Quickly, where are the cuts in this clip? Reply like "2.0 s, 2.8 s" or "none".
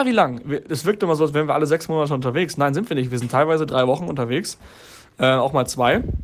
none